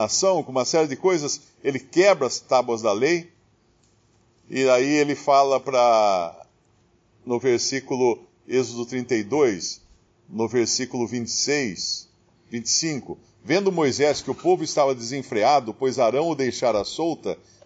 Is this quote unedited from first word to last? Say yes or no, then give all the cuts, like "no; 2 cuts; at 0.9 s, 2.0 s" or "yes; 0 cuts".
yes; 0 cuts